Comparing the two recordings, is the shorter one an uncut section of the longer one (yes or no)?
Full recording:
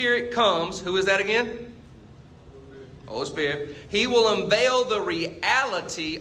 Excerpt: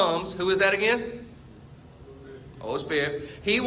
yes